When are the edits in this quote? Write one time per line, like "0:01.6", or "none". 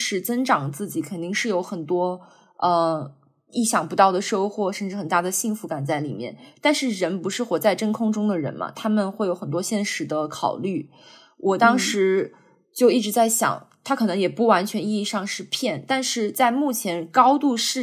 none